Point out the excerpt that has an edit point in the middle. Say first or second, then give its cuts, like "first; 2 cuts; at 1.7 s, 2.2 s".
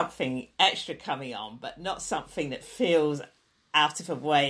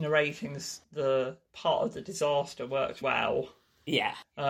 second; 1 cut; at 3.0 s